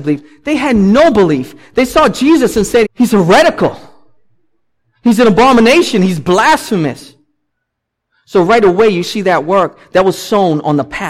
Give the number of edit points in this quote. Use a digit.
1